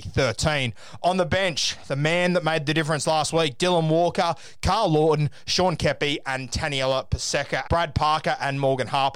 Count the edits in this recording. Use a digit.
1